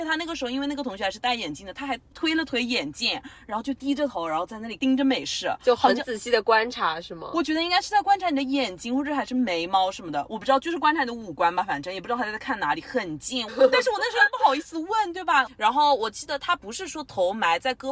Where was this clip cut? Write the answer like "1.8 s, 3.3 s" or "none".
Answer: 13.5 s, 15.5 s